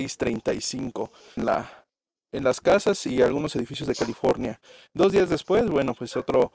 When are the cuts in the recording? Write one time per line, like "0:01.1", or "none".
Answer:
0:01.4